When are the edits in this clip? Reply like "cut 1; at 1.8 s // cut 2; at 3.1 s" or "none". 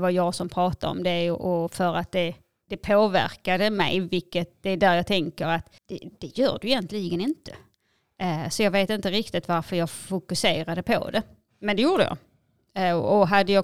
cut 1; at 5.8 s